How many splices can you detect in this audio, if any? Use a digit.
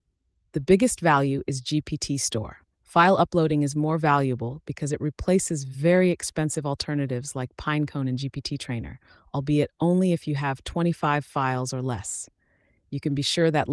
1